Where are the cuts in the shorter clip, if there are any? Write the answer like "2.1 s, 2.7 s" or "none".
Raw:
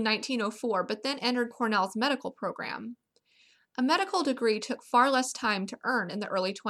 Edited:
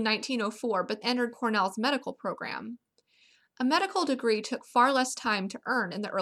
1.0 s